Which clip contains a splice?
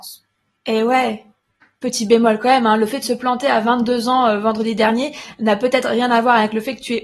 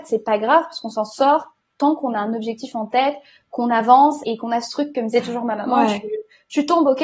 second; 1 cut; at 4.2 s

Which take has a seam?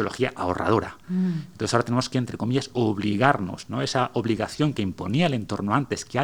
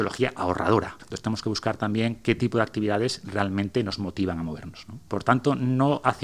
second; 2 cuts; at 1.0 s, 5.0 s

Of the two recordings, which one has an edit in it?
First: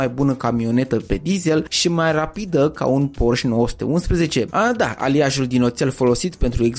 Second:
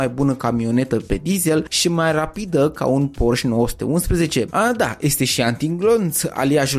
first; 1 cut; at 5.0 s

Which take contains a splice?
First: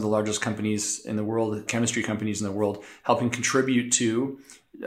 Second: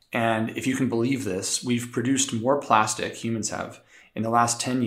first; 1 cut; at 1.7 s

